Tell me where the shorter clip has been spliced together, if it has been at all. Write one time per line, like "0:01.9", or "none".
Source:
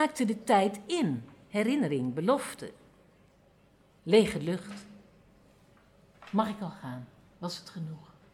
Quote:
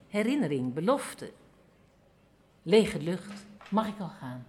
0:03.6